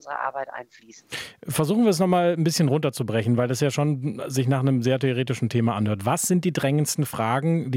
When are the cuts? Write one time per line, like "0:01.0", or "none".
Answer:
none